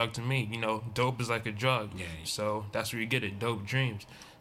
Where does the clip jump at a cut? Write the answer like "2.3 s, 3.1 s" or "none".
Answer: 2.2 s